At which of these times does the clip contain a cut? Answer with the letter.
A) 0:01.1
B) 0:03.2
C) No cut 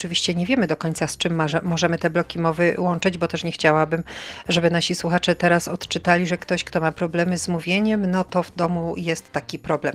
C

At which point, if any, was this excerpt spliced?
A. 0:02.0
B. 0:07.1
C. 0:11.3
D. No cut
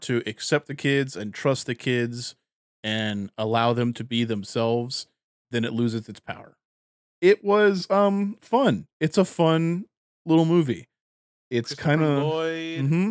B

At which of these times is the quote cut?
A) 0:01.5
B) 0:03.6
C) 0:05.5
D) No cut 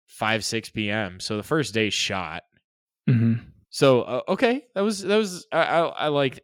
B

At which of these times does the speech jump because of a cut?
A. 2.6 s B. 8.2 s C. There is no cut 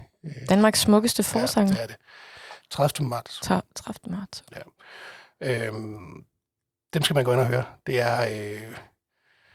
A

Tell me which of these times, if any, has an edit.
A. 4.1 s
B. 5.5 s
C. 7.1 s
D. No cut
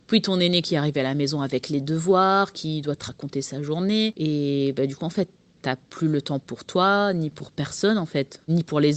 D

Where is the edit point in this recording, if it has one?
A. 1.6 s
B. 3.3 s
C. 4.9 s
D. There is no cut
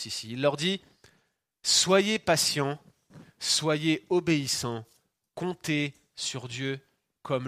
D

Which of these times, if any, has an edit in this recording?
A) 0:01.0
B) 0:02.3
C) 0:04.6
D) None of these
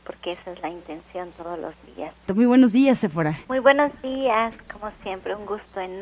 B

